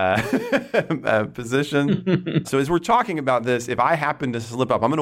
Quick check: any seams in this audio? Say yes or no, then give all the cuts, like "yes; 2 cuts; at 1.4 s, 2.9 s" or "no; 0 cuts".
yes; 1 cut; at 2.4 s